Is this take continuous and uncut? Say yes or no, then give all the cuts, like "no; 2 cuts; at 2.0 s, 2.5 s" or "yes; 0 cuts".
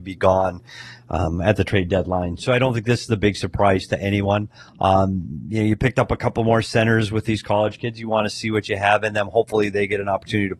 yes; 0 cuts